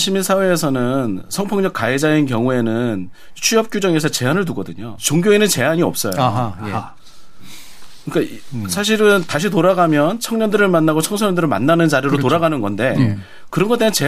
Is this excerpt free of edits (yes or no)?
no